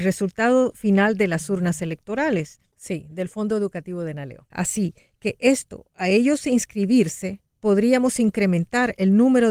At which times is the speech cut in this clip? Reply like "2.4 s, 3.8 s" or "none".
2.7 s, 4.5 s